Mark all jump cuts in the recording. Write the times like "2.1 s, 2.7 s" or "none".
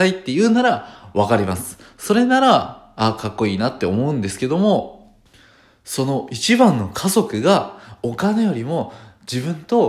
none